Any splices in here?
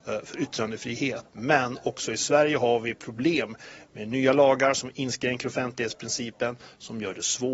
yes; 1 cut; at 1.3 s

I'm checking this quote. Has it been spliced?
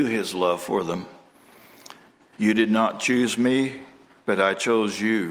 yes; 1 cut; at 2.4 s

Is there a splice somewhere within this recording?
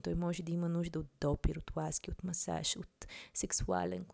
no; 0 cuts

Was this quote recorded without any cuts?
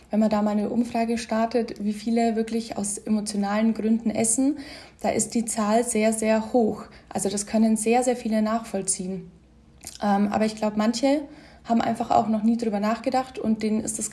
yes; 0 cuts

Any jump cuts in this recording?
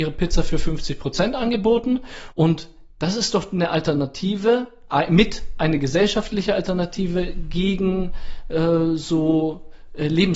yes; 1 cut; at 2.3 s

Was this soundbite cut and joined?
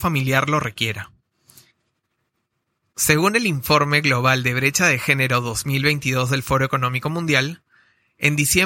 no; 0 cuts

